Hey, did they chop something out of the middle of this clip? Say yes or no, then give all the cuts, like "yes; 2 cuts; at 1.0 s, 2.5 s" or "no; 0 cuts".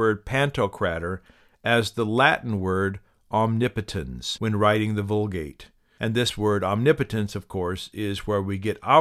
no; 0 cuts